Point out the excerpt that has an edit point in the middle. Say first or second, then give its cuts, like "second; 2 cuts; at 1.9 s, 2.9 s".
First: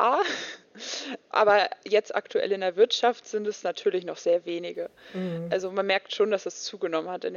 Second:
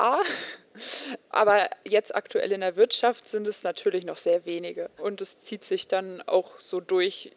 second; 1 cut; at 5.0 s